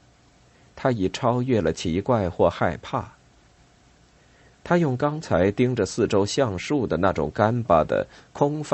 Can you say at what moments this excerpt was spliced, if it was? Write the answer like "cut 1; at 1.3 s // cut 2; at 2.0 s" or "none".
cut 1; at 7.6 s

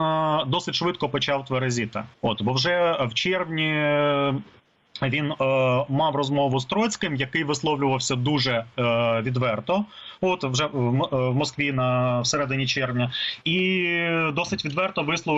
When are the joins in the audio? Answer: cut 1; at 2.1 s

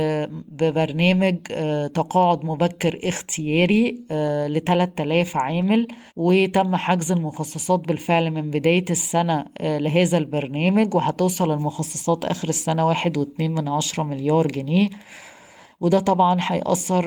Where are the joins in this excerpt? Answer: cut 1; at 6.1 s

